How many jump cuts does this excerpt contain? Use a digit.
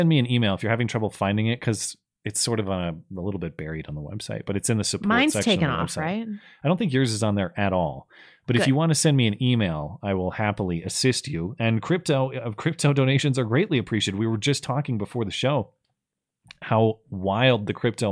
0